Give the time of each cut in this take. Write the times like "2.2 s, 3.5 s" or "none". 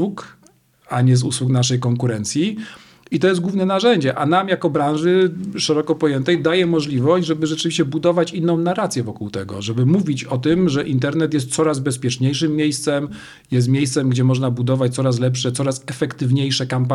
none